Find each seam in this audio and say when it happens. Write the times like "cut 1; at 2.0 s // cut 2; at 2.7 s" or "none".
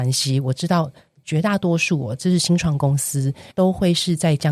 cut 1; at 3.5 s